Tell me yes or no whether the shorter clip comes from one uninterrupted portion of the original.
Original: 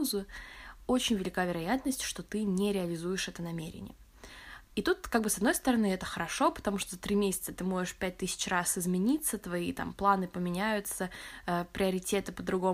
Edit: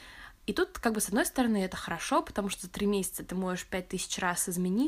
yes